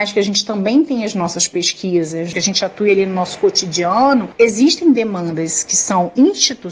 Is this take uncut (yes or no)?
no